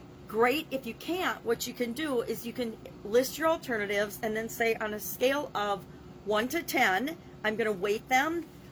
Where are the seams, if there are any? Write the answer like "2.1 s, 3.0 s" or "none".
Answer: 4.8 s